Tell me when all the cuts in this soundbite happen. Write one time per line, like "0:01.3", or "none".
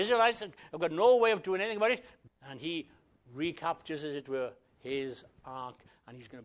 0:02.3